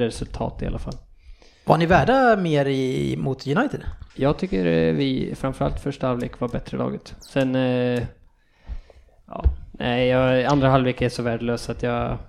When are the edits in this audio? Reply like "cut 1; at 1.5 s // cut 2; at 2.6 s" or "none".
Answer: cut 1; at 4.1 s